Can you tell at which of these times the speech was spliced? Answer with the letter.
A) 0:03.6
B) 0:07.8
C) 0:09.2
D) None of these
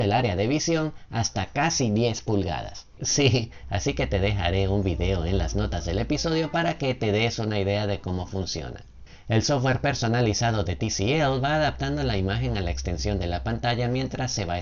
A